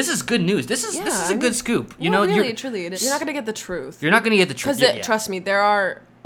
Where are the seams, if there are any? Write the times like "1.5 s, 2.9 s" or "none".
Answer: 2.9 s